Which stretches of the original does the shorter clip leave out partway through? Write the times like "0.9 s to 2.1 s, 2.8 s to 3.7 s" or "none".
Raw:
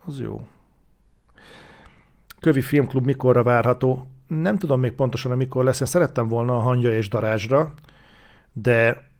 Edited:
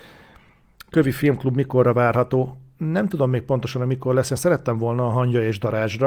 none